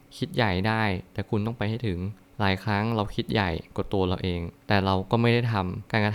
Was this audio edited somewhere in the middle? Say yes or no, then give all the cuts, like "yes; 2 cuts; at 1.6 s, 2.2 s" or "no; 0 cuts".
yes; 1 cut; at 4.6 s